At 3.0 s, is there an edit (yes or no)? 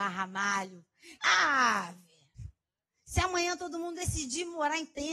no